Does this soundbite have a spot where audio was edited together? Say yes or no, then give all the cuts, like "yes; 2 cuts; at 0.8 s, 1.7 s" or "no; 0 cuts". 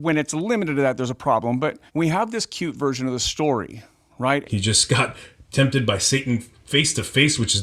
yes; 2 cuts; at 1.9 s, 4.4 s